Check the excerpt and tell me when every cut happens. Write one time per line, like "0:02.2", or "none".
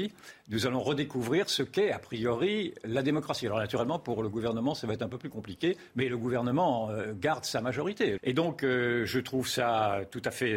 0:08.2